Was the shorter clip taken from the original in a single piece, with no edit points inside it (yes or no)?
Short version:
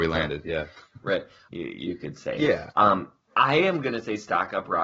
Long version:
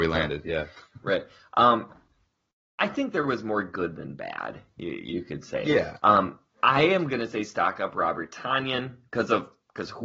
no